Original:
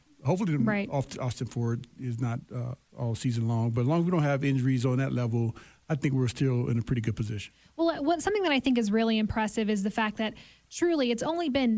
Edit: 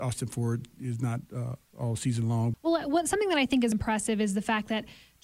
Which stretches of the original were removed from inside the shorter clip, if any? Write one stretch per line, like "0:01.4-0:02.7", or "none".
0:03.7-0:07.7
0:08.9-0:09.2

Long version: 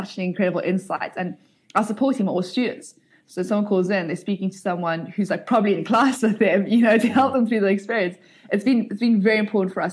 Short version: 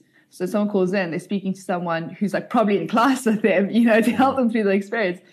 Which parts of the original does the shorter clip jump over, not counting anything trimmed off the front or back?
none

